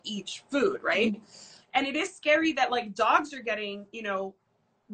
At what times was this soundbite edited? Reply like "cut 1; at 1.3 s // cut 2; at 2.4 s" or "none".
cut 1; at 1.6 s